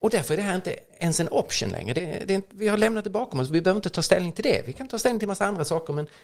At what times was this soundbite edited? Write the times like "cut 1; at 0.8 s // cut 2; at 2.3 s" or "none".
cut 1; at 2.0 s